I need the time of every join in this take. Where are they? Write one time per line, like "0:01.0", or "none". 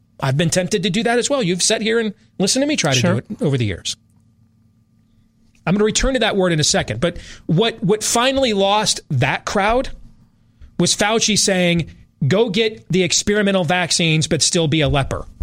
none